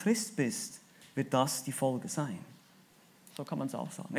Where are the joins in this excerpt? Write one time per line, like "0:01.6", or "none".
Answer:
0:03.3